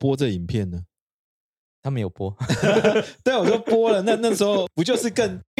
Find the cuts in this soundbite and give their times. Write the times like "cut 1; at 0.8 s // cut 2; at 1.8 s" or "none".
none